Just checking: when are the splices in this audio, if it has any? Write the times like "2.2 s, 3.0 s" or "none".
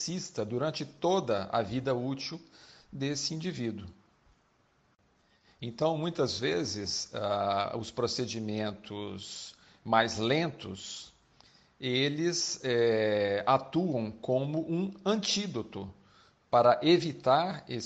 none